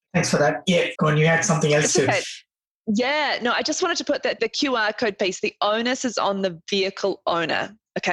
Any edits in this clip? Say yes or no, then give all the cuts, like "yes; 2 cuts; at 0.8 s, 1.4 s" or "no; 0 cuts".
yes; 2 cuts; at 0.9 s, 4.4 s